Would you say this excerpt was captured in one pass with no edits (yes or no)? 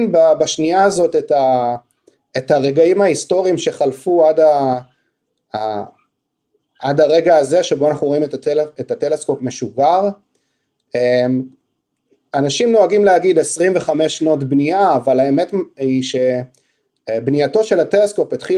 yes